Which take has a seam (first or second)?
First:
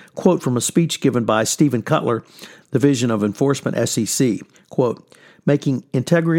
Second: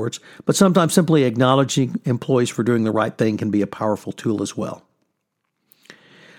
first